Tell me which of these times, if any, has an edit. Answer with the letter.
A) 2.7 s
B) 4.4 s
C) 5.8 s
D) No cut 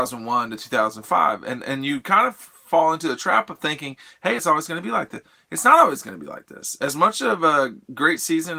B